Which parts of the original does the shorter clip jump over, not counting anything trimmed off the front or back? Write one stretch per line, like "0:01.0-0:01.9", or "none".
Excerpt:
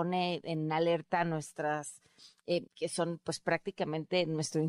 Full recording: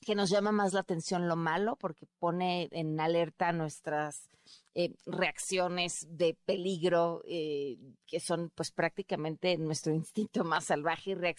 0:05.0-0:08.0